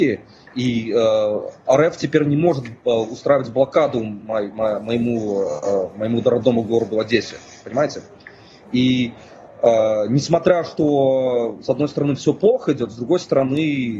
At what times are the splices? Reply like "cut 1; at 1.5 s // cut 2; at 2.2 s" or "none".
none